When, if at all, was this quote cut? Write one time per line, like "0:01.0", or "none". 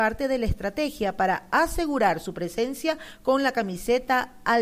none

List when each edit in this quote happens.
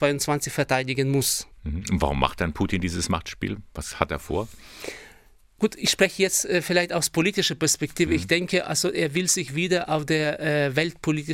0:01.5

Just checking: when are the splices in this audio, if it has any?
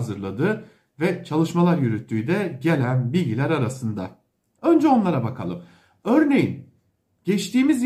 0:04.6

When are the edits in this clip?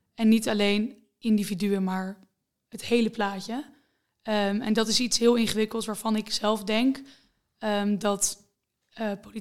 none

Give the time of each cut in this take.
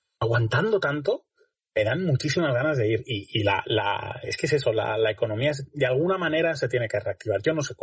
none

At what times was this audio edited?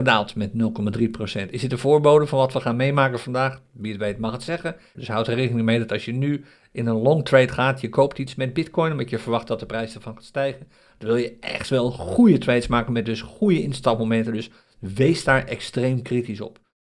0:04.9

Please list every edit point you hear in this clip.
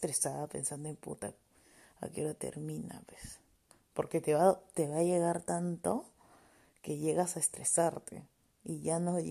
none

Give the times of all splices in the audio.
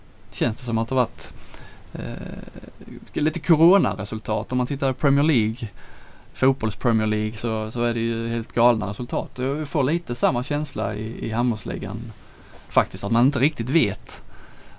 none

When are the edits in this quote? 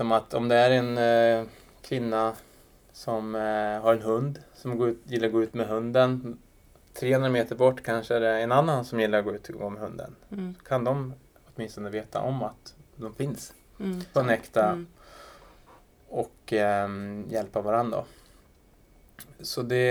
0:14.1

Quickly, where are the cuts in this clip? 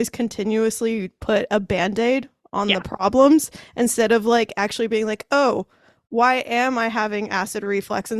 none

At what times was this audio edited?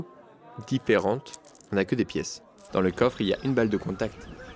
0:02.7

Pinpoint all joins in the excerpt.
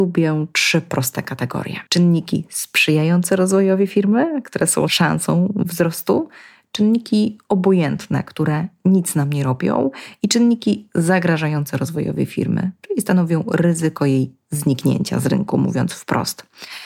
0:01.9

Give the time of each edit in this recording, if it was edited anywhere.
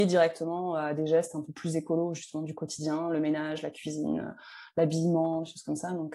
none

